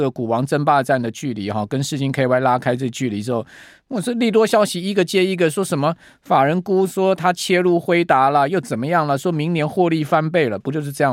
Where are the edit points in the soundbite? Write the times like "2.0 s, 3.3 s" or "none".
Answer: none